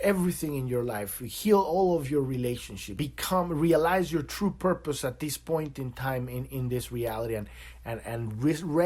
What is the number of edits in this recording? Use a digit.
1